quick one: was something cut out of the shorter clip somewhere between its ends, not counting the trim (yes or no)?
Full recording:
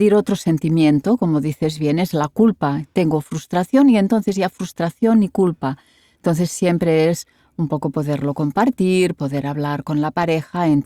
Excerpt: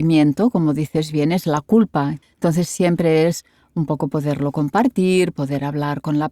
yes